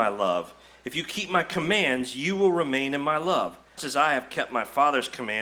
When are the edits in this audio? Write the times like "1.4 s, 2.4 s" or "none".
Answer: 3.8 s